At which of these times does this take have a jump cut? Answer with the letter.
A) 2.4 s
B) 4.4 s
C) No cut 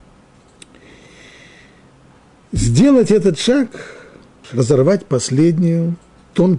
B